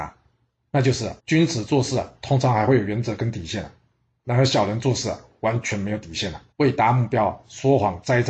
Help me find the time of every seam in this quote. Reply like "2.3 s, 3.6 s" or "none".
1.2 s, 6.5 s